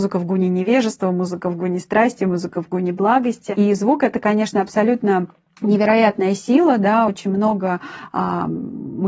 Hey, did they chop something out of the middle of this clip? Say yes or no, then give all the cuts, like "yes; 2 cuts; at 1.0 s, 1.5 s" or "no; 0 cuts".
no; 0 cuts